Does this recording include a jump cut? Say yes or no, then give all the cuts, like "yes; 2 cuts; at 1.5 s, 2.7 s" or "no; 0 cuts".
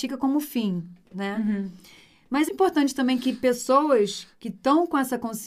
yes; 1 cut; at 2.5 s